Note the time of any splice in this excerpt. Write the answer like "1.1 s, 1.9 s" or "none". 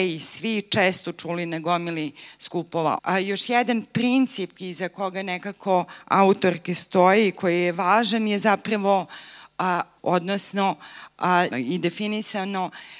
3.0 s, 10.0 s, 11.5 s